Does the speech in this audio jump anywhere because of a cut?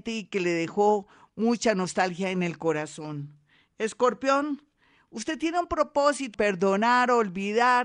yes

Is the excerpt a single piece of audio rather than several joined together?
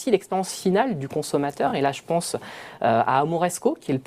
yes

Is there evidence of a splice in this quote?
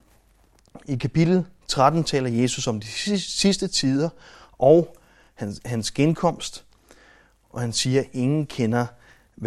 no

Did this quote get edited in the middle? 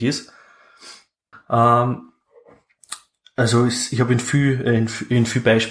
yes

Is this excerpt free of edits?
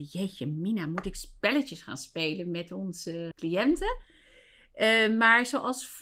no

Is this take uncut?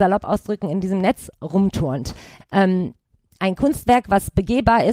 no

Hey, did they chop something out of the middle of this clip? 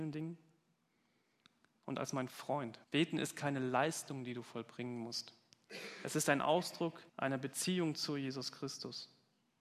yes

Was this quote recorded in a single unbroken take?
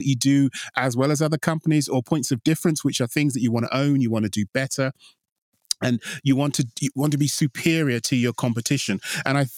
yes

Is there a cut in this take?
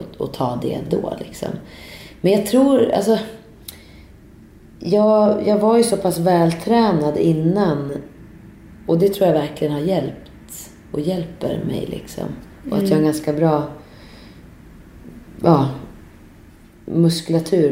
no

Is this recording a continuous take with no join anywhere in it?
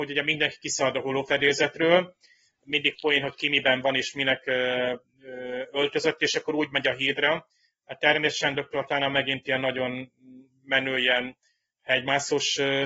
no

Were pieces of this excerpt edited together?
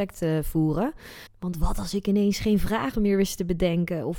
yes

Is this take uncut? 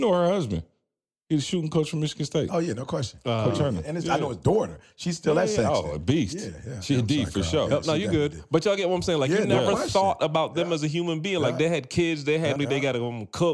no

